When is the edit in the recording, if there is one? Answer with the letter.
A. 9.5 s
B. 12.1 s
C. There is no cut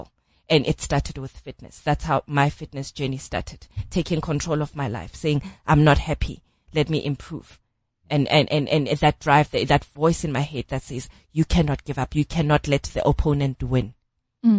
C